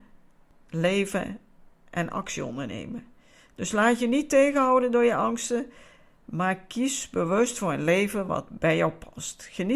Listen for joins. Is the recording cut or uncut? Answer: uncut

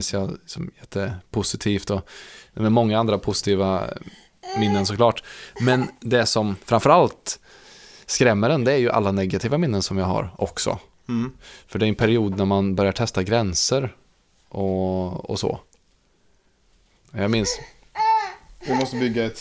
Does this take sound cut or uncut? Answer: uncut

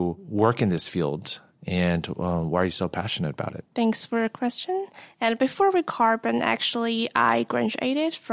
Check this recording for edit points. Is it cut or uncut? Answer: cut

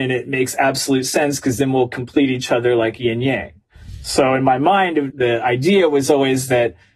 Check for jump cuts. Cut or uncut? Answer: cut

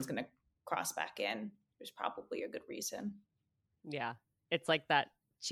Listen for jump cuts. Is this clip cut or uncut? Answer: uncut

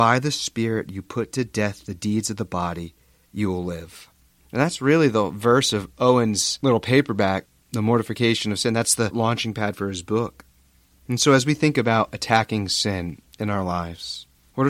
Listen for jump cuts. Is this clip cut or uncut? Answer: uncut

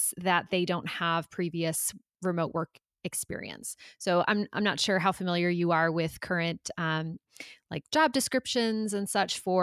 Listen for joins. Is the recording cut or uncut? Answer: uncut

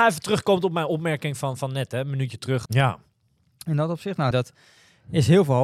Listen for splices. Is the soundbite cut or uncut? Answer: cut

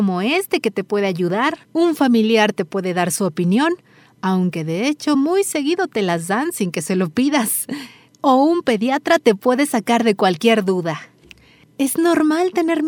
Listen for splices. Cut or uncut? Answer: uncut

